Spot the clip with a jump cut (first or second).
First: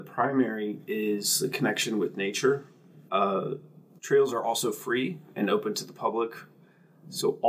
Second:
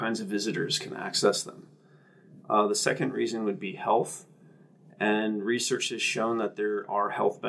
first